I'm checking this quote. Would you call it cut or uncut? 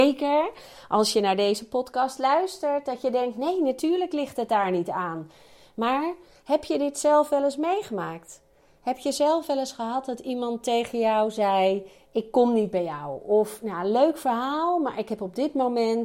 uncut